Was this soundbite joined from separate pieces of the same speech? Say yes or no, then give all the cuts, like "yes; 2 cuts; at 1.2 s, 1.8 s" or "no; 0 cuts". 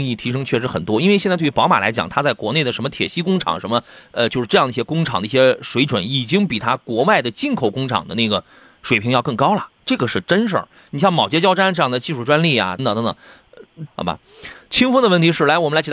yes; 2 cuts; at 12.8 s, 13.9 s